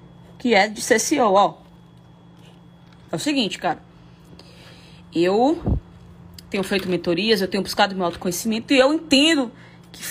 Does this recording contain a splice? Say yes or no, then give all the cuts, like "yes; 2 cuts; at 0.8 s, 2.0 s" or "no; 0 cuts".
no; 0 cuts